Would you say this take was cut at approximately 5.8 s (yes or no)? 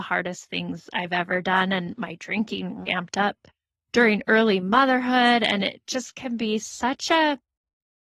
no